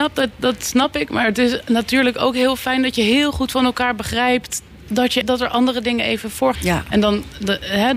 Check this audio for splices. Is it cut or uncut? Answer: cut